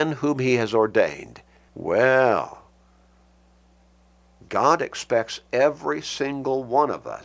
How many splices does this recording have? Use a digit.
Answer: 1